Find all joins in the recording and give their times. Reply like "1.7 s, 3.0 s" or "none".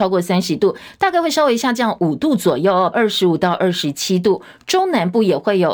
2.9 s